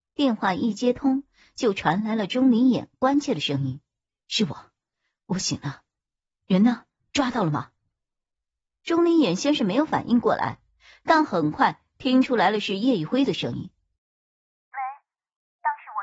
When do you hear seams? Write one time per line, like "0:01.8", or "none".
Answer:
none